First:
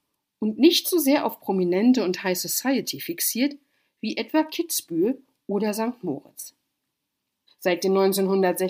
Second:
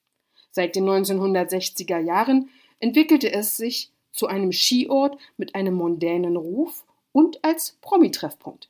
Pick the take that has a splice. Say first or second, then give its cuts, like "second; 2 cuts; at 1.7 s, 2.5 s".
first; 1 cut; at 7.5 s